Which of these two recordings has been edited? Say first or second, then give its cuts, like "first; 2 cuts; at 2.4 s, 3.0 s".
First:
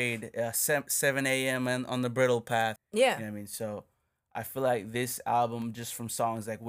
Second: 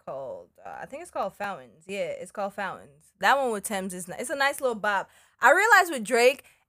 first; 1 cut; at 2.8 s